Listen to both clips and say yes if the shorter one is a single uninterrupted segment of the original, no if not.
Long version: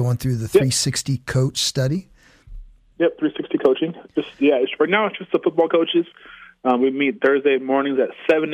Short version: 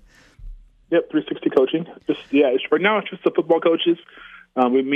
yes